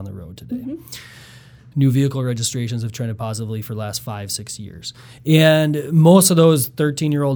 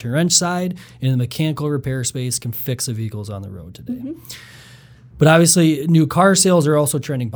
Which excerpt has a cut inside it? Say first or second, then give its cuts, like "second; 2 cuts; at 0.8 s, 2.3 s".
first; 2 cuts; at 1.7 s, 5.2 s